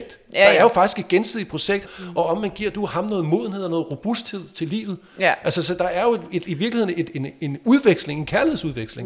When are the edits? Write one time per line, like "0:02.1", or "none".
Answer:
0:01.8